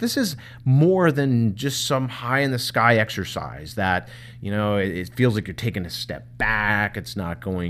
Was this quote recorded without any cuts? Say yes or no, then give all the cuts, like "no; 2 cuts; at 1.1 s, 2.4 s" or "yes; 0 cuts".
yes; 0 cuts